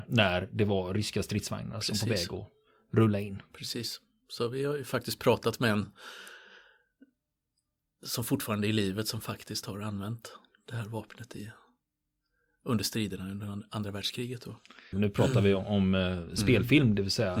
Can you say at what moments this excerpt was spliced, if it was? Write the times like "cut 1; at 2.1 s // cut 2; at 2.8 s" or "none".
cut 1; at 14.9 s